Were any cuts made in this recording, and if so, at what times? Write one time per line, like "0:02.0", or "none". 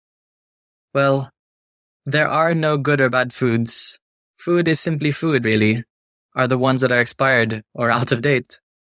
0:04.2
0:05.4